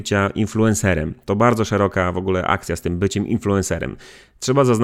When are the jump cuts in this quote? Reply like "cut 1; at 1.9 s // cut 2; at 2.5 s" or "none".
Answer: none